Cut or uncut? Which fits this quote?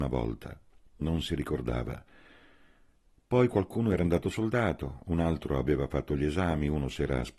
uncut